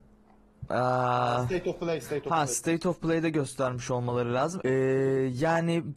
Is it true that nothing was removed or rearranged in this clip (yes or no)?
no